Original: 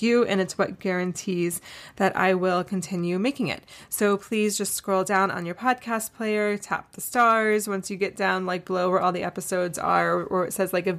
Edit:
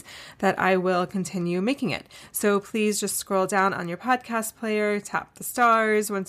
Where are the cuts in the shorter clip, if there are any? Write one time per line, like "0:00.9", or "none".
none